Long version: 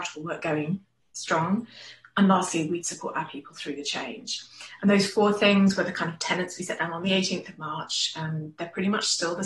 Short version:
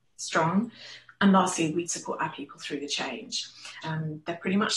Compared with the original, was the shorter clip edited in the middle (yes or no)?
yes